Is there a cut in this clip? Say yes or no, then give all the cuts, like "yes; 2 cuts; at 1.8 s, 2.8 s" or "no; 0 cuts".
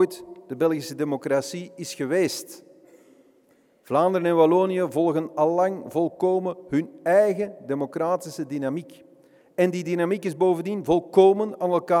no; 0 cuts